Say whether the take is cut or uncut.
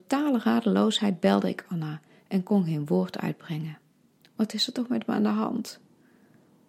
cut